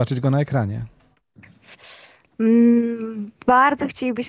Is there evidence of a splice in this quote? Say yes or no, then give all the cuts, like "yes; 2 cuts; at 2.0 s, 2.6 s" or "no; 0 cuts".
no; 0 cuts